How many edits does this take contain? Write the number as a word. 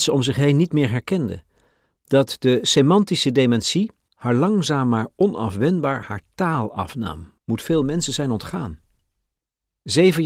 two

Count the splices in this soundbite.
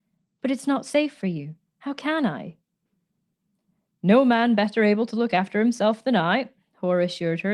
zero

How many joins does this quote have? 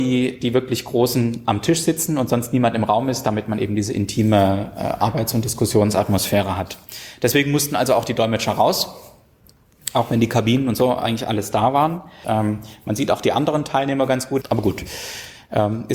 two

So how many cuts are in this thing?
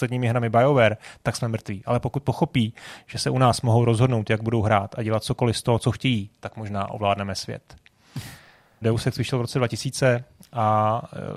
one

